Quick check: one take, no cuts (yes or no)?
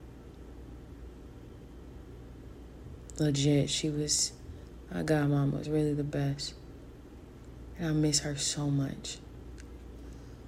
yes